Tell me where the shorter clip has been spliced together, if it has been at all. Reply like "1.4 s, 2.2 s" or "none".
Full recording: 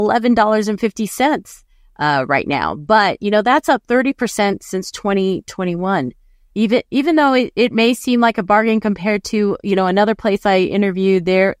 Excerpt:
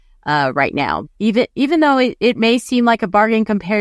1.0 s